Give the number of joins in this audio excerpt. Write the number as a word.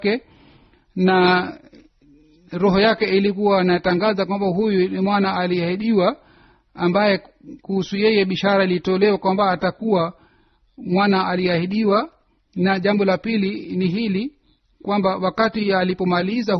zero